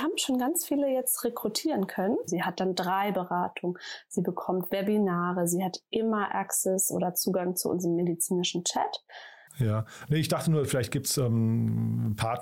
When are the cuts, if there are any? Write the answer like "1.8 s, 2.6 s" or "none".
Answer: 2.3 s, 9.5 s